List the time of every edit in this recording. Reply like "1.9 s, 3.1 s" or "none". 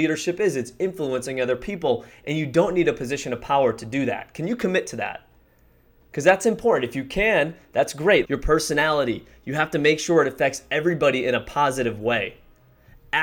8.2 s